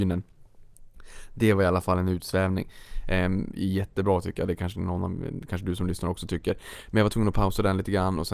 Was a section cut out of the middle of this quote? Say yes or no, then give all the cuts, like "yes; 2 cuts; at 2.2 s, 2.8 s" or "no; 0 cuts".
yes; 1 cut; at 3.5 s